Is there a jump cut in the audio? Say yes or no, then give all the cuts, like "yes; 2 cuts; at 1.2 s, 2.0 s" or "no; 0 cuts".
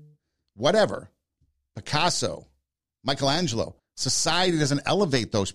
yes; 1 cut; at 3.8 s